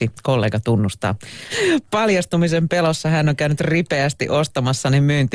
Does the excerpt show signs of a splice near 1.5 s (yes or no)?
yes